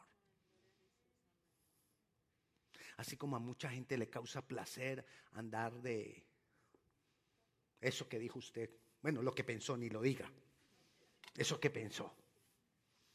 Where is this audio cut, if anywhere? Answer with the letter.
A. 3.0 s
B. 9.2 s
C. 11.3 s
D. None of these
D